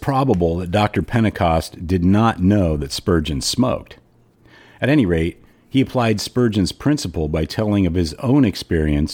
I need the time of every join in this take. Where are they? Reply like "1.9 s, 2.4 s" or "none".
none

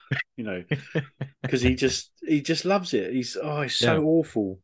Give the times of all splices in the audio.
none

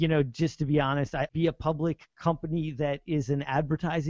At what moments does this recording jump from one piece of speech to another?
1.3 s

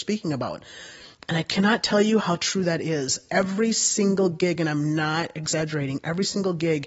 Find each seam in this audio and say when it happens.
none

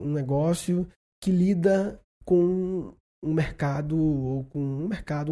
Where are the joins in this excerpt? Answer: none

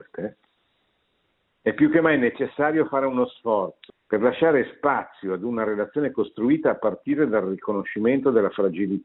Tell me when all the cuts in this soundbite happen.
3.9 s

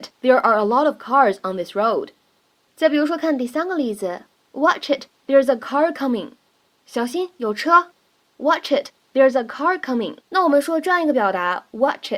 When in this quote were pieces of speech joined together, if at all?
10.2 s

